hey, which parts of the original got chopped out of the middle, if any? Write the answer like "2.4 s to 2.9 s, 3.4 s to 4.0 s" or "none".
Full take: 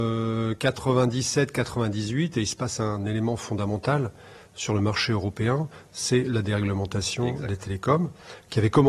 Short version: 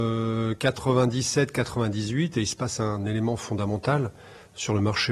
none